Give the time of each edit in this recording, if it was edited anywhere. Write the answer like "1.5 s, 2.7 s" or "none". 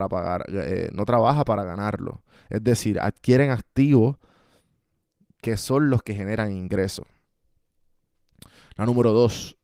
none